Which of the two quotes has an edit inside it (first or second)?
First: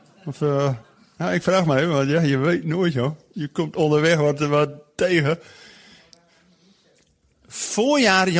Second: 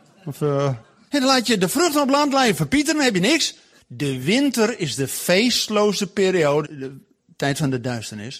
second